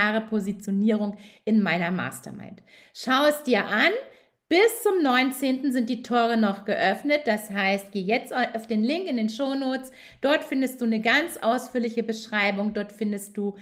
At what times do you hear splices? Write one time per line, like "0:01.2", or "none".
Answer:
none